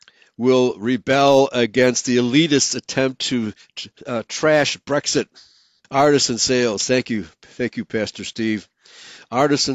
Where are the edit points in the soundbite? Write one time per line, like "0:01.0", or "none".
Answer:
0:05.8